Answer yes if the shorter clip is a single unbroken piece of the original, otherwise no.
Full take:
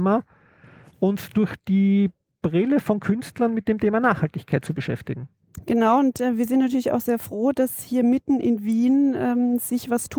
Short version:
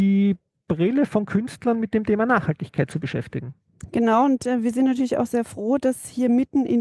yes